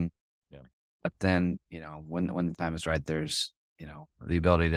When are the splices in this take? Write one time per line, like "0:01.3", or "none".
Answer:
none